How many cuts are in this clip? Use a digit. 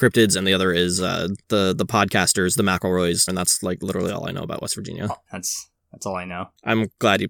2